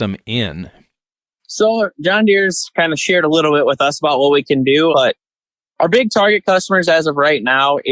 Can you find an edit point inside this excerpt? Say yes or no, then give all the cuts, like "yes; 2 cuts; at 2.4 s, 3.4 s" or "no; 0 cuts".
yes; 1 cut; at 4.9 s